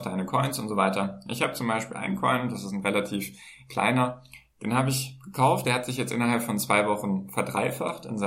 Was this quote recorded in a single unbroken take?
yes; 0 cuts

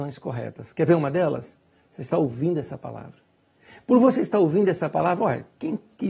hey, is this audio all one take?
yes; 0 cuts

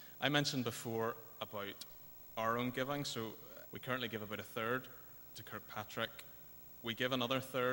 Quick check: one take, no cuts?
no; 1 cut; at 3.7 s

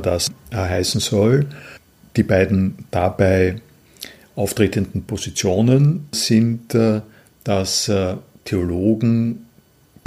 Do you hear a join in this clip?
no; 0 cuts

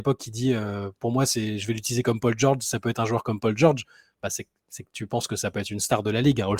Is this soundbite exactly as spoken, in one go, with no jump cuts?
yes; 0 cuts

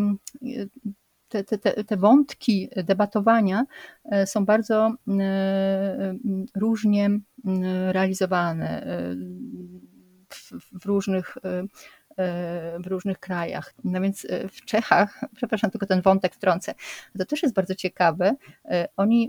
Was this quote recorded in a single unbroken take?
no; 1 cut; at 13.7 s

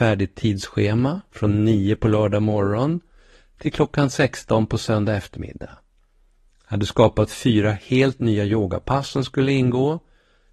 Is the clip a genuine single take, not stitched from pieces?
yes; 0 cuts

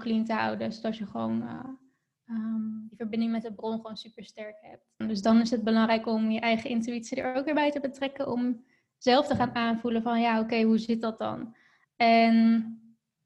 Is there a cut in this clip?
yes; 1 cut; at 5.0 s

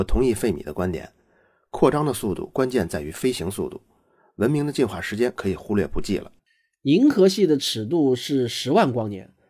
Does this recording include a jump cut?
no; 0 cuts

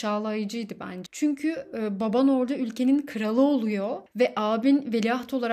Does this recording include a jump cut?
yes; 1 cut; at 1.1 s

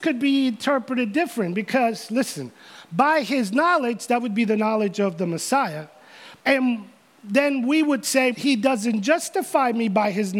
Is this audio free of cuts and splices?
no; 2 cuts; at 6.4 s, 8.3 s

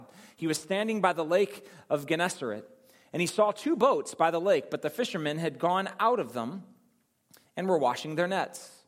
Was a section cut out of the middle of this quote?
no; 0 cuts

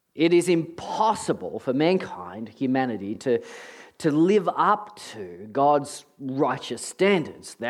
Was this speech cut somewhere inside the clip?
no; 0 cuts

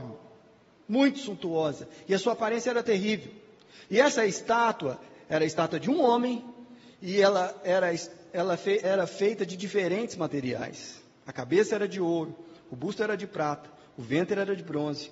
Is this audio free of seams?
no; 1 cut; at 8.8 s

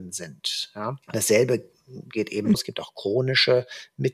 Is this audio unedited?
no; 2 cuts; at 1.0 s, 2.5 s

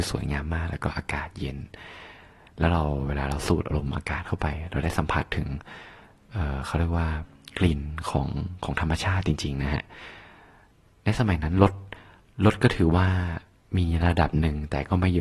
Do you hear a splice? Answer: no; 0 cuts

